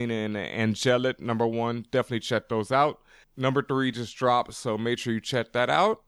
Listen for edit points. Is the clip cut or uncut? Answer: cut